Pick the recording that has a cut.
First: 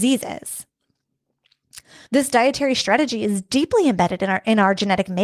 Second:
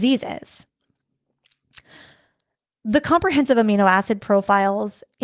first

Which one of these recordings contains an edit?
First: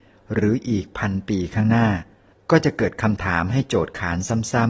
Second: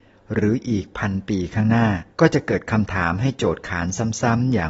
second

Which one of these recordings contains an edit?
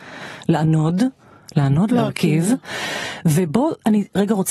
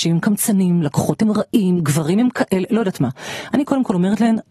first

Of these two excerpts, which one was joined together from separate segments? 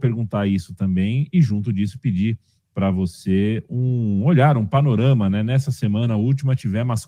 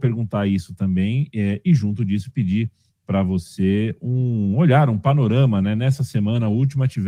first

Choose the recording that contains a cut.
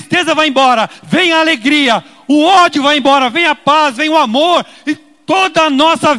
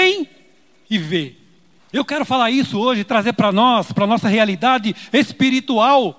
second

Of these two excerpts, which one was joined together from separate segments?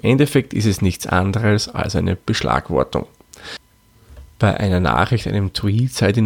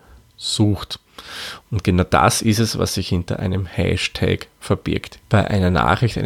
second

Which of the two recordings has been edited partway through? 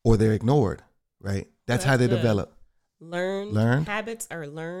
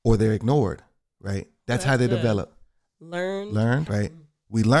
second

